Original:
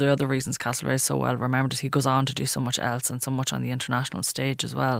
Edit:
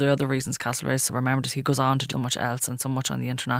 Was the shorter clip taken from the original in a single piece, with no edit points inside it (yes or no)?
no